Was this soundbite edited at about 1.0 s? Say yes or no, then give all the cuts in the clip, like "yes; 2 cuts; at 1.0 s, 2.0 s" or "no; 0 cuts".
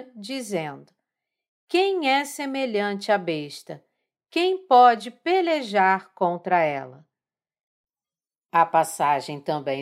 no; 0 cuts